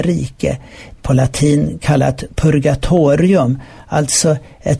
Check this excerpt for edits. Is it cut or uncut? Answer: cut